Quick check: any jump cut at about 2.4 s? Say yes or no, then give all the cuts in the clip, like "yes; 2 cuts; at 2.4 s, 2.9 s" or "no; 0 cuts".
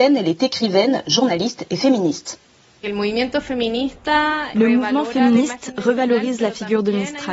no; 0 cuts